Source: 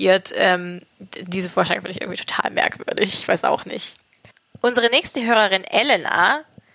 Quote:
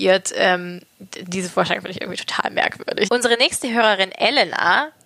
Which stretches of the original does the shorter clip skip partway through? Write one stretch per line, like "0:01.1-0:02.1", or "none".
0:03.1-0:04.6